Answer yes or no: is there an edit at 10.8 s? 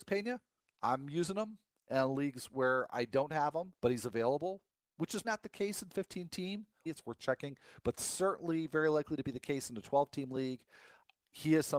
no